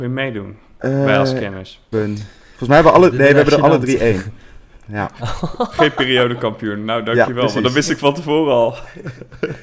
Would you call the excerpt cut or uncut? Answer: cut